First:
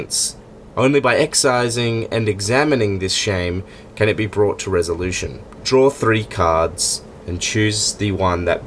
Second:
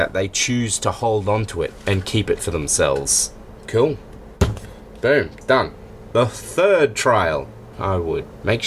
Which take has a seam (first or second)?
second